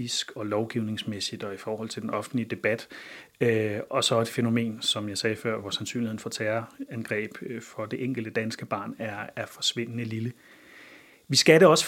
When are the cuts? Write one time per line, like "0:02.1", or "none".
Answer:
0:05.6